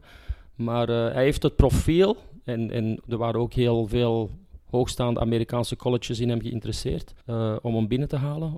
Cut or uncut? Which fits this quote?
cut